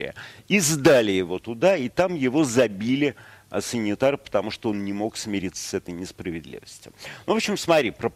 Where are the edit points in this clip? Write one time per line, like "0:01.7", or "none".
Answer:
none

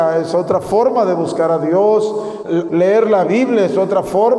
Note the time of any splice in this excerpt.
0:02.7

